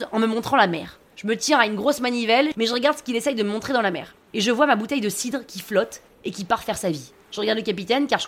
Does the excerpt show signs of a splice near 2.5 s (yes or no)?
yes